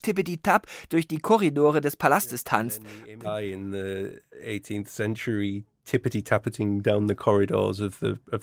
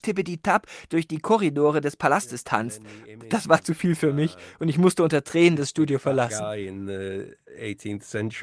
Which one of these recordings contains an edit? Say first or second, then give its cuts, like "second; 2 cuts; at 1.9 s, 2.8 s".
first; 1 cut; at 3.2 s